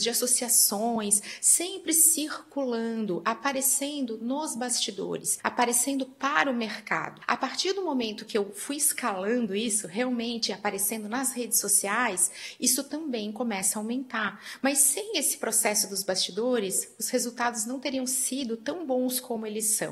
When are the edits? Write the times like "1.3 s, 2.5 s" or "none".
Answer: none